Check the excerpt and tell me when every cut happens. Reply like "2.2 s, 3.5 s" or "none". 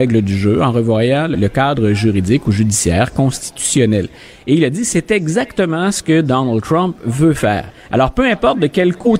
1.3 s, 7.8 s

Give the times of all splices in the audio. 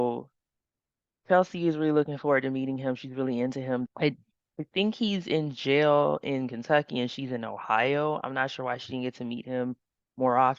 3.9 s

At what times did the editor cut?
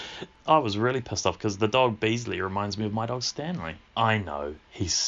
3.9 s

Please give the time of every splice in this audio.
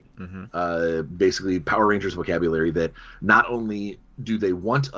none

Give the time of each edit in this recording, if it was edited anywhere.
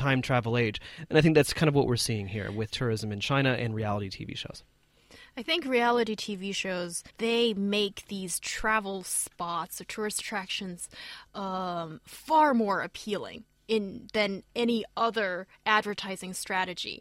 7.1 s

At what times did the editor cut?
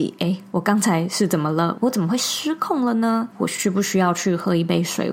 1.8 s, 3.3 s

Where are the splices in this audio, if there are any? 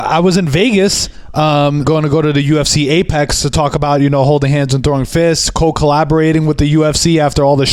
1.8 s

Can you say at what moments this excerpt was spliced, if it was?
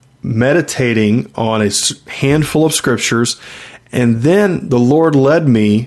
none

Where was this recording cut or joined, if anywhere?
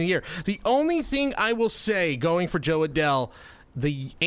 none

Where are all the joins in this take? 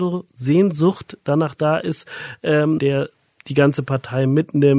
2.8 s

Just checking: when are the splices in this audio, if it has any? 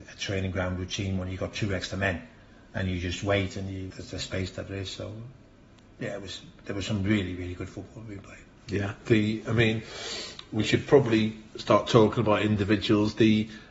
3.9 s

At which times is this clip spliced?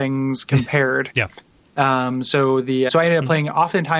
1.1 s, 2.9 s

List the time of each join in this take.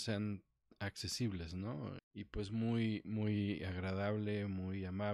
2.0 s

